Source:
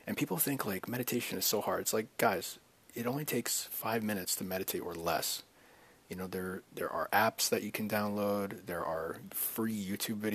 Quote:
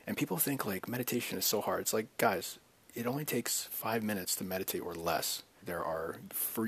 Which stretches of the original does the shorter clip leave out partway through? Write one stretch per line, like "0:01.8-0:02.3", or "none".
0:05.6-0:08.6